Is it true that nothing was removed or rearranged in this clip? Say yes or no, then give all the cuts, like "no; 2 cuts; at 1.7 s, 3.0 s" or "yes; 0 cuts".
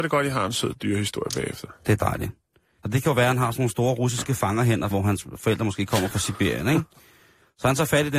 no; 2 cuts; at 2.8 s, 4.9 s